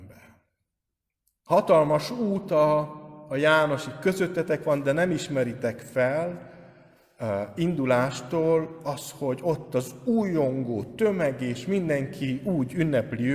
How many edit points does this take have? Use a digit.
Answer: 0